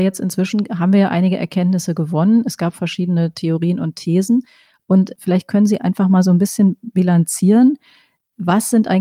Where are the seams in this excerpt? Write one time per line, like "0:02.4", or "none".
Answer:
none

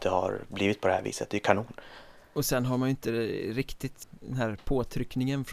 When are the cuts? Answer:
0:04.0

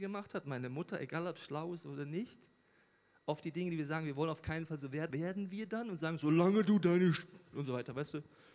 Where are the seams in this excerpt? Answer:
0:05.1

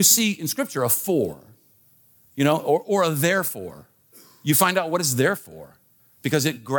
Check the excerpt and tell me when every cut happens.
none

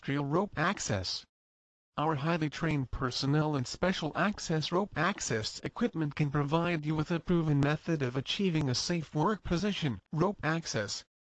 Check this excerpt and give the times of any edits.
0:10.0

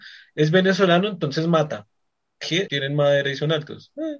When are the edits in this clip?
0:02.7

